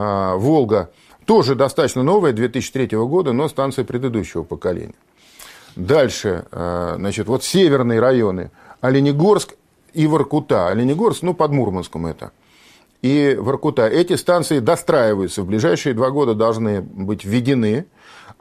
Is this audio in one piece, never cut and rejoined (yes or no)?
yes